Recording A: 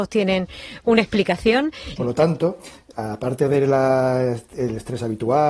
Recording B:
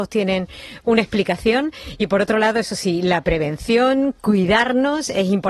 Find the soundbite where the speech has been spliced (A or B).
A